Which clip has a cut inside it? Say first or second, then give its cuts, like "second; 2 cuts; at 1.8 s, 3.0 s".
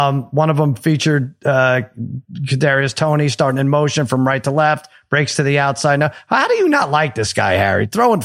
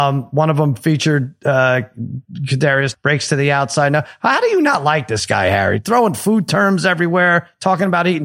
second; 1 cut; at 2.9 s